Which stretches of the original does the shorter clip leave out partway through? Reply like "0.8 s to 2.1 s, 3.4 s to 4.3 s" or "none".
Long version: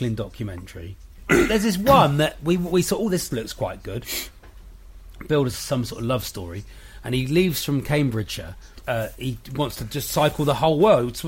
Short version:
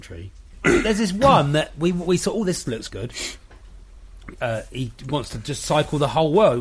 3.5 s to 3.8 s, 5.3 s to 8.8 s